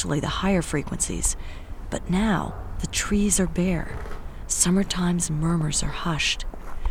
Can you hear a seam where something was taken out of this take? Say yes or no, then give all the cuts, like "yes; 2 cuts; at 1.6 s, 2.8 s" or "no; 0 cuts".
no; 0 cuts